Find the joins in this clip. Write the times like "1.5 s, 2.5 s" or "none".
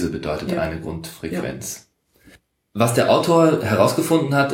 none